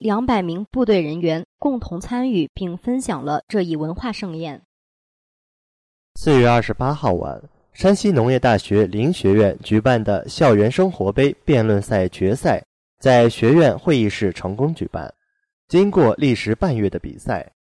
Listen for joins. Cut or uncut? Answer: uncut